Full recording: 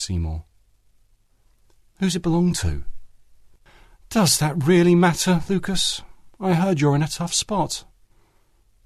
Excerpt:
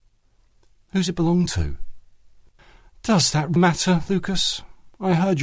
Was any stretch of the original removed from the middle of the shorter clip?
yes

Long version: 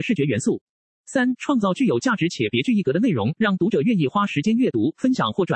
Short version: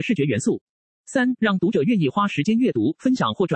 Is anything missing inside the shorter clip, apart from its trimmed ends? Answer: yes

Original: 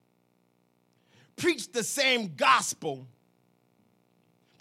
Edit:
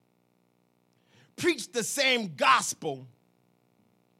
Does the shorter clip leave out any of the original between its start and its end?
no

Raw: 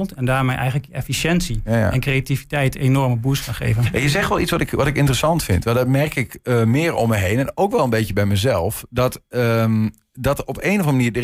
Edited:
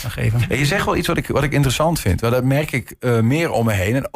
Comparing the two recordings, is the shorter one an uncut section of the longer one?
yes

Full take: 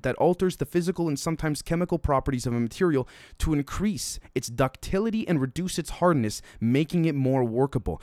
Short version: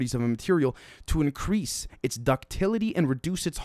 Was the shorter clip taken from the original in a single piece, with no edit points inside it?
yes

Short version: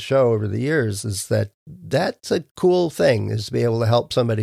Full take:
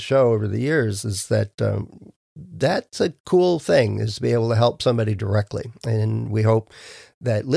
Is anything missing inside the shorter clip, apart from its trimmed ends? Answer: yes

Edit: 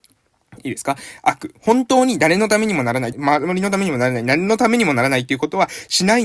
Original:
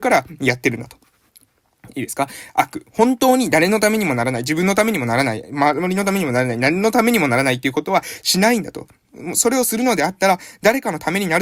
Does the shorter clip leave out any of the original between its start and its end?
yes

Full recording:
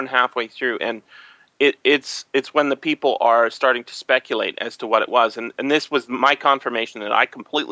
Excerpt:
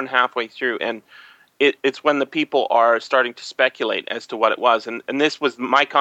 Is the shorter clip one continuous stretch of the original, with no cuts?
no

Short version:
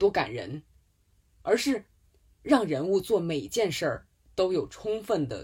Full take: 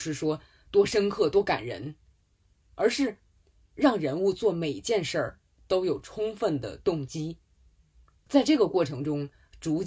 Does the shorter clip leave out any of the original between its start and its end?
no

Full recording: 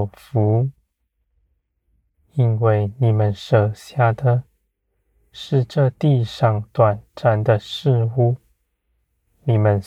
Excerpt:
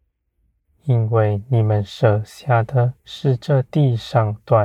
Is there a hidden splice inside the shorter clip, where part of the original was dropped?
yes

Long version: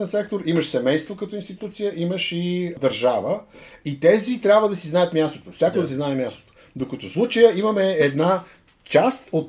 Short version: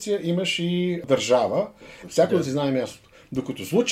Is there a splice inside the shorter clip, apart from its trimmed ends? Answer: yes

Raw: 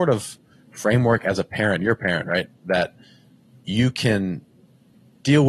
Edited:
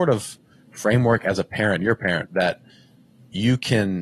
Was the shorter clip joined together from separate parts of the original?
yes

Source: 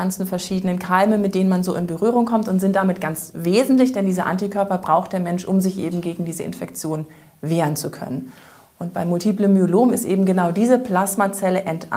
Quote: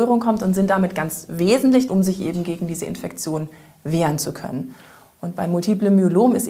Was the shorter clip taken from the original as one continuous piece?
no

